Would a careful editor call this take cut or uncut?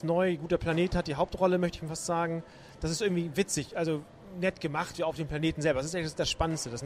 uncut